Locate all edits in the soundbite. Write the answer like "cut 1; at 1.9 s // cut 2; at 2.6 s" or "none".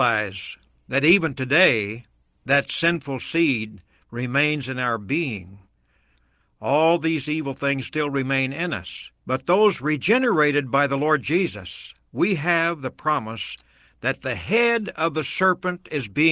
cut 1; at 9.2 s